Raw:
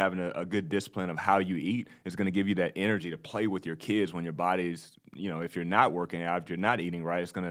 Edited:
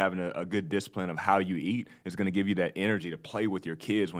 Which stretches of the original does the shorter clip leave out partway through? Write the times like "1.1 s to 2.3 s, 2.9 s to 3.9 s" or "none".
none